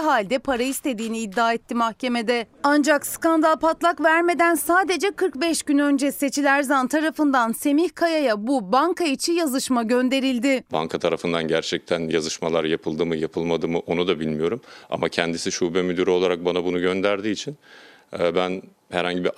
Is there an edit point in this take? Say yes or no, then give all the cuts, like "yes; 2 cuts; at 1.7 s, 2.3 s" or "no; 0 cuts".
no; 0 cuts